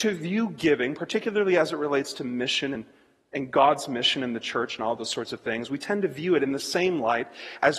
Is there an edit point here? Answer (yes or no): no